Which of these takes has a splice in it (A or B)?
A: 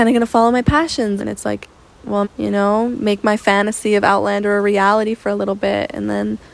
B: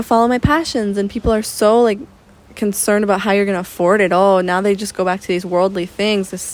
A